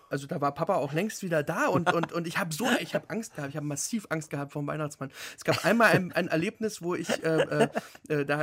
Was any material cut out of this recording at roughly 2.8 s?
no; 0 cuts

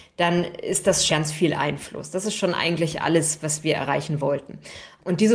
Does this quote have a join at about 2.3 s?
no; 1 cut; at 1.1 s

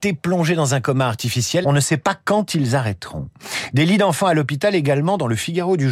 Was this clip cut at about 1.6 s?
yes; 1 cut; at 1.6 s

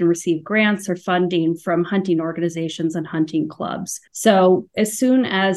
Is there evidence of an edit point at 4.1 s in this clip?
yes; 1 cut; at 4.1 s

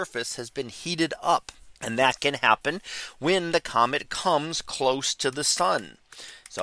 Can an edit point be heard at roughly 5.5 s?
no; 1 cut; at 1.8 s

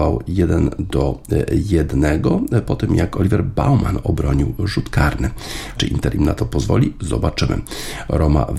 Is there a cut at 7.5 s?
no; 1 cut; at 5.8 s

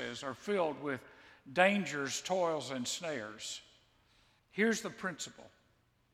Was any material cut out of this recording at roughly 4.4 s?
yes; 1 cut; at 4.4 s

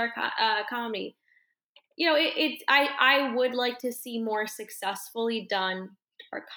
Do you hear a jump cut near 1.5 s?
no; 0 cuts

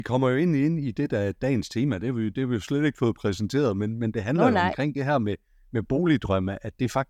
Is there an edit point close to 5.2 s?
no; 0 cuts

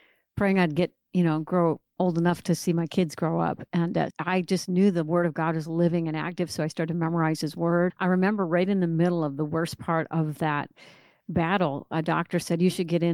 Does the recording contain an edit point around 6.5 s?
no; 2 cuts; at 4.1 s, 7.9 s

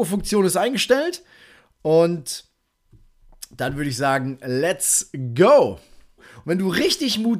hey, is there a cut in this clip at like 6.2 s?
yes; 1 cut; at 6.2 s

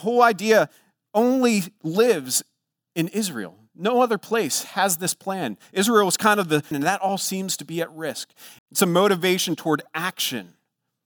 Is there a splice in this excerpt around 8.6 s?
yes; 2 cuts; at 6.7 s, 8.6 s

